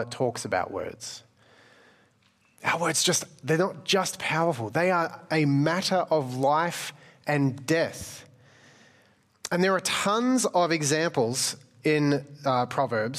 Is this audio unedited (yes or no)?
yes